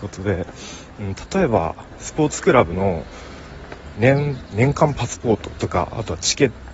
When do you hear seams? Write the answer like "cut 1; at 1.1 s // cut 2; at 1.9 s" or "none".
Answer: cut 1; at 3.9 s

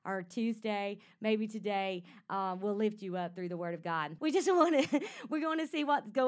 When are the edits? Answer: cut 1; at 4.2 s

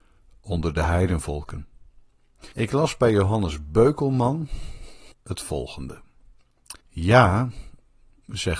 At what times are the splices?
cut 1; at 2.5 s // cut 2; at 5.1 s // cut 3; at 6.8 s

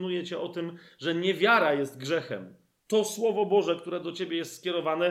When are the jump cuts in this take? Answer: none

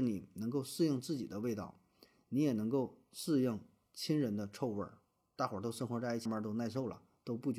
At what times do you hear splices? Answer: cut 1; at 6.3 s

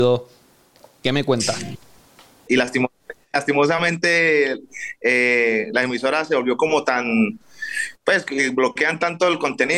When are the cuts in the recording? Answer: cut 1; at 2.5 s

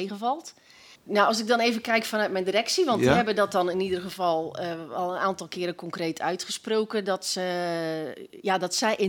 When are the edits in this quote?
cut 1; at 1.0 s

